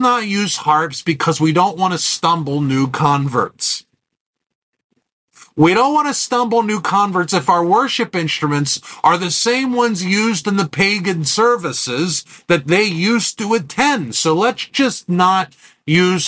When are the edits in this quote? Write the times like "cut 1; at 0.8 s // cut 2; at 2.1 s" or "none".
none